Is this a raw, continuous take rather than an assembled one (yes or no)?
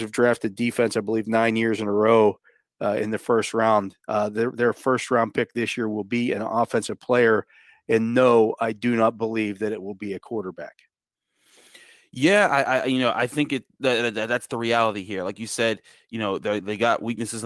yes